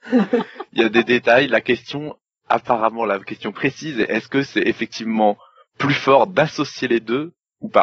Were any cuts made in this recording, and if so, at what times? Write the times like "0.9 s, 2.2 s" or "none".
none